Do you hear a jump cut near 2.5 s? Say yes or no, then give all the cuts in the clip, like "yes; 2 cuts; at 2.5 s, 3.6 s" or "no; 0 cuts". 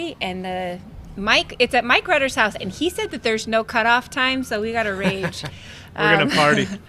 no; 0 cuts